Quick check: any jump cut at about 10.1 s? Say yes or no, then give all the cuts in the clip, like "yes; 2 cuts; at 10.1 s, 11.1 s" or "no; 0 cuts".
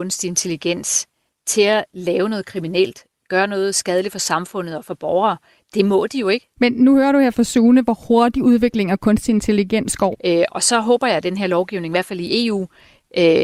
yes; 2 cuts; at 6.6 s, 10.1 s